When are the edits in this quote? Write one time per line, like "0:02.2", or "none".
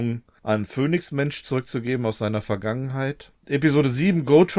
0:03.4